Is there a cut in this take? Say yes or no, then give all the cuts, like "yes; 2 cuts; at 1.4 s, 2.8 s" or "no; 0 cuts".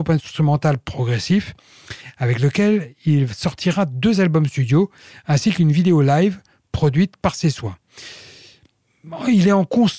no; 0 cuts